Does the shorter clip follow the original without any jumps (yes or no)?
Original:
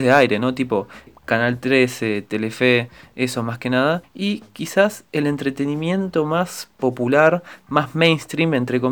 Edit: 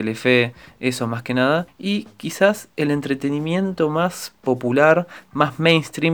yes